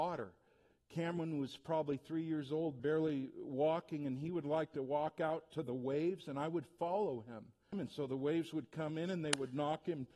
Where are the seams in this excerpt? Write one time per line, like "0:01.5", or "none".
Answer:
0:07.7